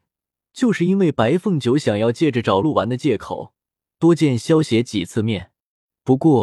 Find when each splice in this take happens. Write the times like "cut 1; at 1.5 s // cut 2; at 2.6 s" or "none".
cut 1; at 2.6 s